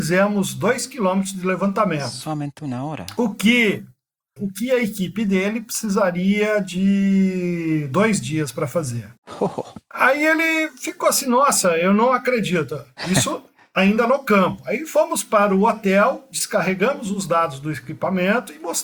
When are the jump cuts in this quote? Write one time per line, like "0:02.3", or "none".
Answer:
0:04.4